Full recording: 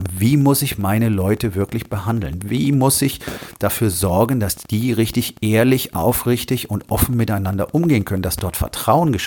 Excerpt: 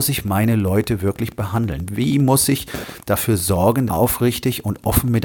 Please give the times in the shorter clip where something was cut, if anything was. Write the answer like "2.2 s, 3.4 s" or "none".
3.9 s